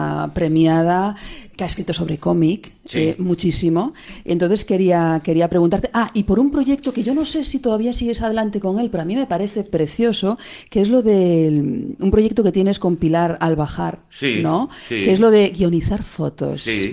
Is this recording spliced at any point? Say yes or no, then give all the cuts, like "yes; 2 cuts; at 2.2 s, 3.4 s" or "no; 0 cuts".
no; 0 cuts